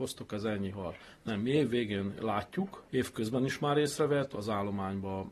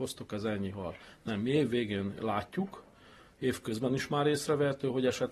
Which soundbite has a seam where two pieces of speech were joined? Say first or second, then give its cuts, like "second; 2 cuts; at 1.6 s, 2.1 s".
first; 2 cuts; at 2.9 s, 4.3 s